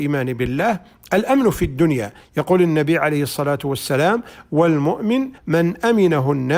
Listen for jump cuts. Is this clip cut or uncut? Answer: cut